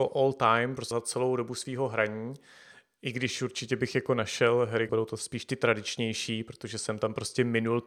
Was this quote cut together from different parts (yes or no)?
yes